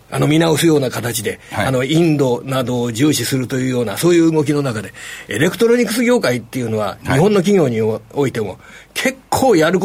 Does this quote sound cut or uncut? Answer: uncut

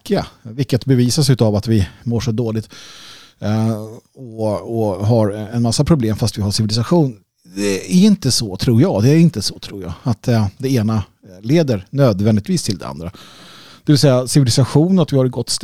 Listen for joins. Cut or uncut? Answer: uncut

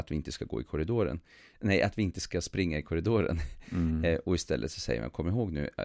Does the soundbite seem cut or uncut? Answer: uncut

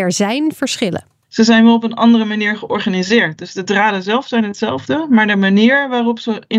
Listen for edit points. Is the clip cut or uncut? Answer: uncut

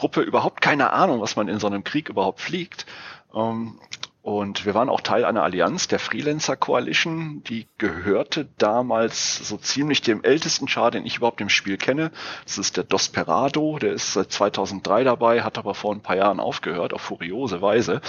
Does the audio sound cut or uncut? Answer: uncut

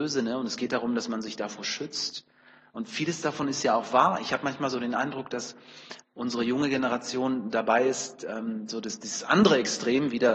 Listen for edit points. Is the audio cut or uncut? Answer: uncut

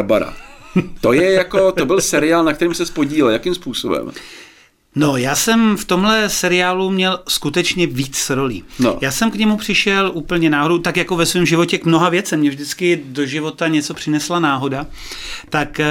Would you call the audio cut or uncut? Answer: uncut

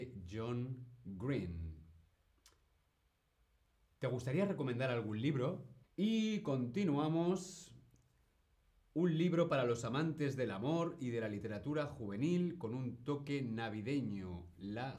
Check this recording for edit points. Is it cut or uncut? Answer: cut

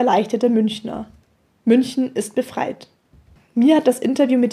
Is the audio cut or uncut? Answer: cut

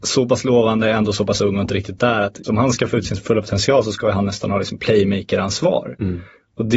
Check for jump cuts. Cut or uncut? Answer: cut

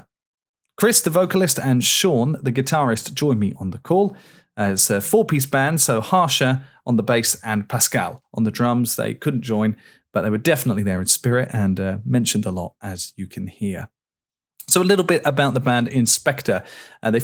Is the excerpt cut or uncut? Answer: uncut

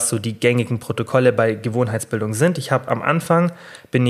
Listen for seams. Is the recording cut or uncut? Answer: uncut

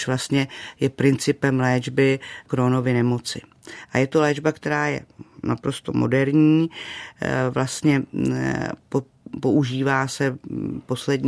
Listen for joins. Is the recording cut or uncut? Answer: uncut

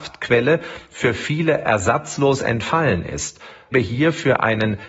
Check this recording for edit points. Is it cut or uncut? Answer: cut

